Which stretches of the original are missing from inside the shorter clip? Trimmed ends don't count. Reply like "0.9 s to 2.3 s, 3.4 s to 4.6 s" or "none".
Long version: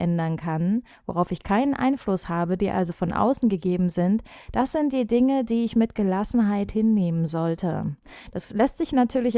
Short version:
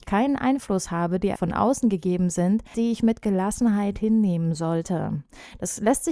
2.7 s to 2.9 s, 4.3 s to 5.5 s